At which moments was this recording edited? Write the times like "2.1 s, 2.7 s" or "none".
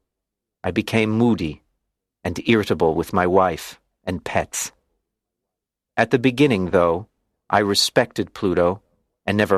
none